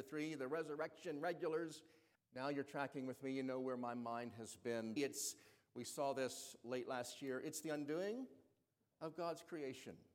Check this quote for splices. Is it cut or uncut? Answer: cut